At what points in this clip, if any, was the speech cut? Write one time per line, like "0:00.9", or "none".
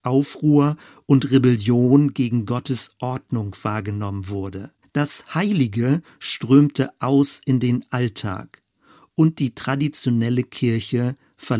0:04.8